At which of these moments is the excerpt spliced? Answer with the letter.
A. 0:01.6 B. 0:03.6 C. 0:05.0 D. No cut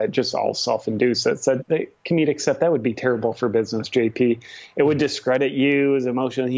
A